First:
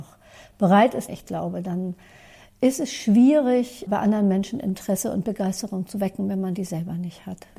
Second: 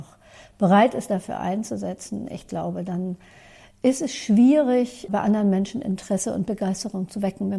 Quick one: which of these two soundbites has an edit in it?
first; 1 cut; at 1.1 s

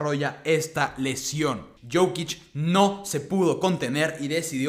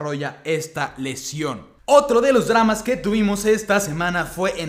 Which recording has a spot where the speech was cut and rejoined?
first; 1 cut; at 1.8 s

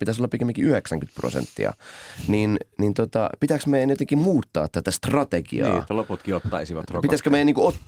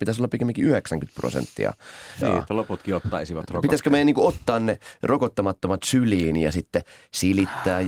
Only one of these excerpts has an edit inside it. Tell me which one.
second; 1 cut; at 2.2 s

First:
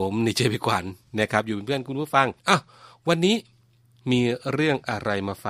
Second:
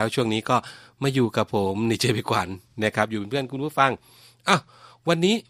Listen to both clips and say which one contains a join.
first; 1 cut; at 2.4 s

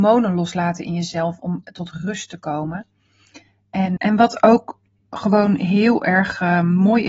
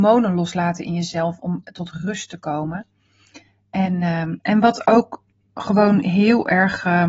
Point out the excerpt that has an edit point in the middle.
first; 1 cut; at 4.0 s

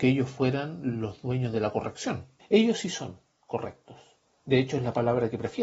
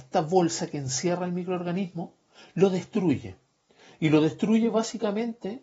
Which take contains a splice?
first; 1 cut; at 2.4 s

